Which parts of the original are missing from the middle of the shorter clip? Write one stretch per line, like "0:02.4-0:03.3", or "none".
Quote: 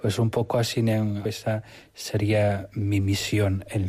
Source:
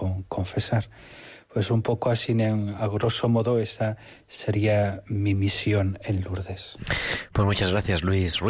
0:02.8-0:03.6